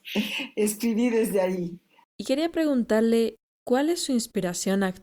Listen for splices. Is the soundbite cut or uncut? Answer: cut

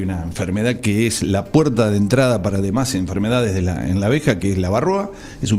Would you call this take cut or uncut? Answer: uncut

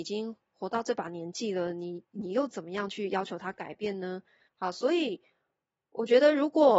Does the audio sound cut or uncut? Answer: cut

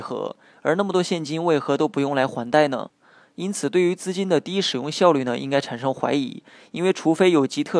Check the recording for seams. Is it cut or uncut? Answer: uncut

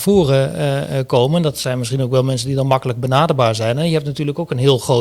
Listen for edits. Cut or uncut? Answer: uncut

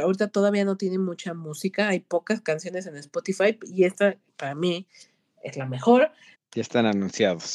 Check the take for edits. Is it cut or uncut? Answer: cut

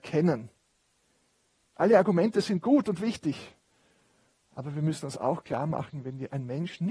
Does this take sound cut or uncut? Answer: cut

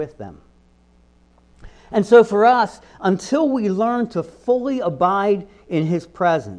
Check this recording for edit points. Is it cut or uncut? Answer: uncut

